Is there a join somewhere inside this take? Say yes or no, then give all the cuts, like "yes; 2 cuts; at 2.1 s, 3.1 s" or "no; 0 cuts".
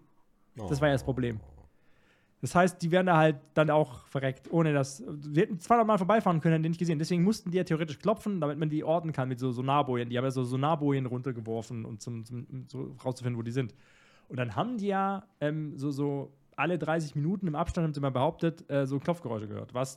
yes; 1 cut; at 3.7 s